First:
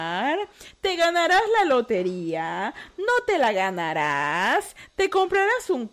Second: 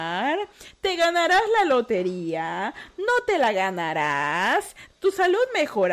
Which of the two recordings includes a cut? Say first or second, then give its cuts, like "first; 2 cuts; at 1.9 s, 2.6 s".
second; 1 cut; at 4.9 s